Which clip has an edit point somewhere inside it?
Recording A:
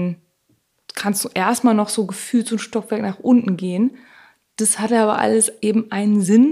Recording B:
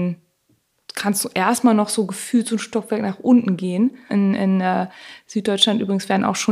B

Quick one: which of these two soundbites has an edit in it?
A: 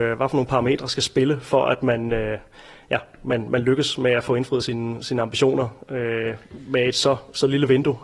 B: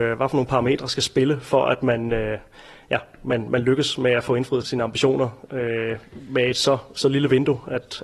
B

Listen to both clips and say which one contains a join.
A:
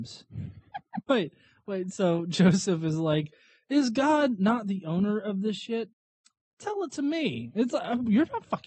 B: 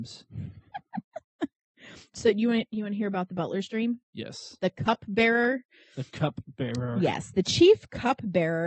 A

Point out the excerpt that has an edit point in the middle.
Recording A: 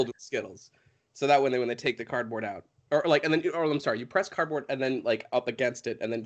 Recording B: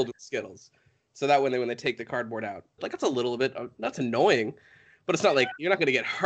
B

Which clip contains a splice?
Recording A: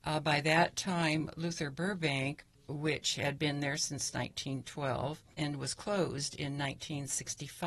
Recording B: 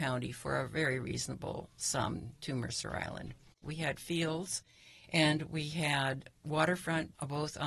B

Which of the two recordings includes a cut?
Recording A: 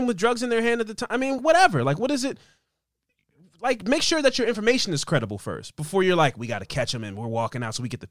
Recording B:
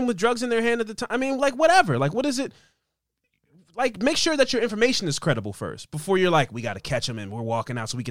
A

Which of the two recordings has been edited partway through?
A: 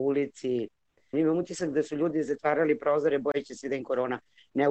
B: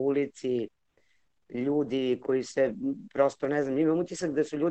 A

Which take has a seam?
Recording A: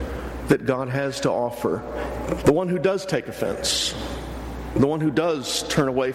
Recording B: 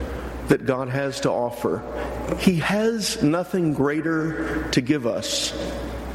A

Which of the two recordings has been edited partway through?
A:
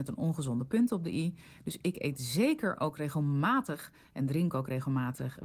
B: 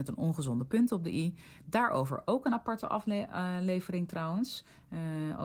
B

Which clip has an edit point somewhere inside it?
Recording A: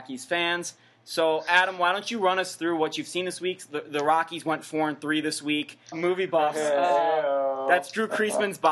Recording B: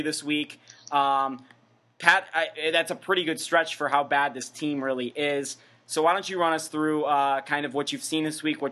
A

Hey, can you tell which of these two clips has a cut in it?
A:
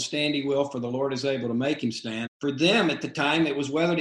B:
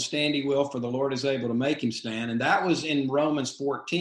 A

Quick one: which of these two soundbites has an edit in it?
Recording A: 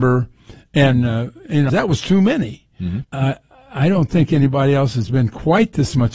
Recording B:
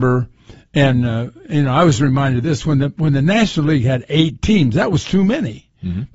A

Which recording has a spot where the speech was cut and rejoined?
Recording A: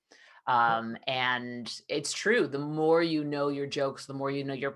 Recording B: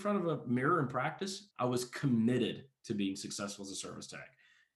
B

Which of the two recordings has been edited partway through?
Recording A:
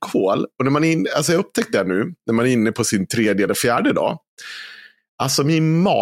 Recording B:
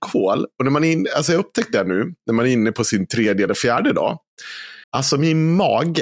B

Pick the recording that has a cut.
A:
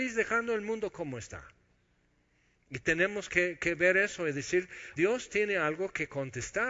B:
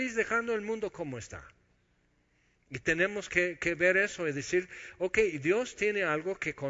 A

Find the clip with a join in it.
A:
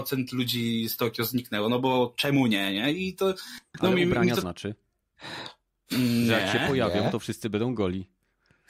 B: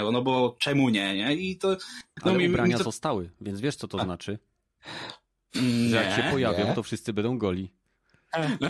A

